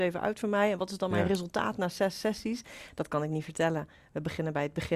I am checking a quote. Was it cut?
no; 0 cuts

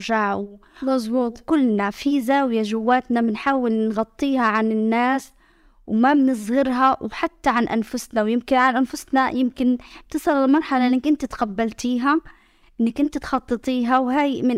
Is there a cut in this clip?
no; 0 cuts

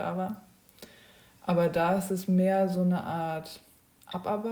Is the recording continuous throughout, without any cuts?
yes; 0 cuts

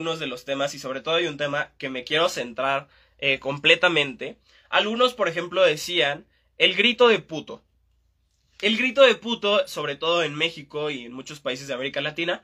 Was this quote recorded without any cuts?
yes; 0 cuts

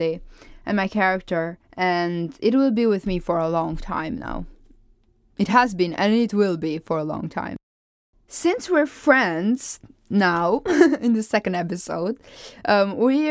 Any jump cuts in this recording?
yes; 1 cut; at 1.6 s

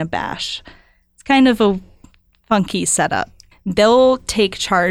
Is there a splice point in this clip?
yes; 1 cut; at 3.5 s

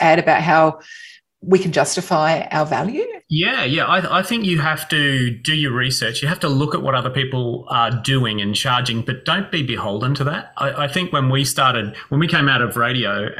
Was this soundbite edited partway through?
yes; 1 cut; at 3.2 s

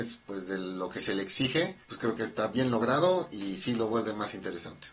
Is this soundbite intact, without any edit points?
no; 1 cut; at 1.8 s

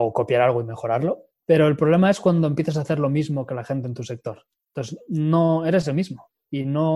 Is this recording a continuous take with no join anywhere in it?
no; 1 cut; at 1.4 s

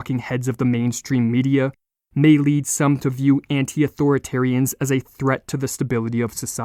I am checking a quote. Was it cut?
no; 0 cuts

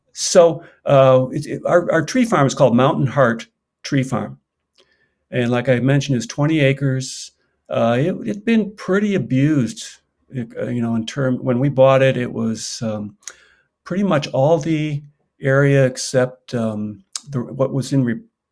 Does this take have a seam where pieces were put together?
no; 0 cuts

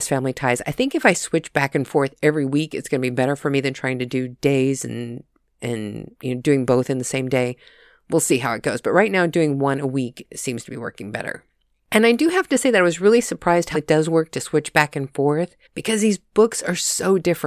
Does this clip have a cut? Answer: yes; 2 cuts; at 13.7 s, 15.7 s

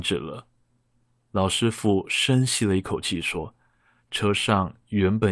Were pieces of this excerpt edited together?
yes; 1 cut; at 4.0 s

